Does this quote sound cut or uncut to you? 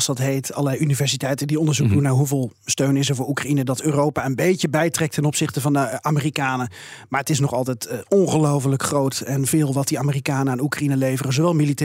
uncut